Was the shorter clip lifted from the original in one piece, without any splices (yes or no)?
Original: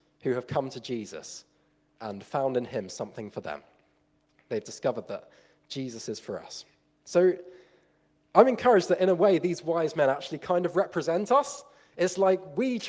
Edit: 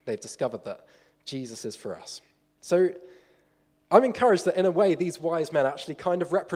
yes